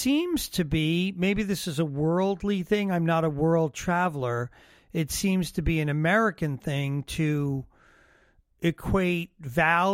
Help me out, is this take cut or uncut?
uncut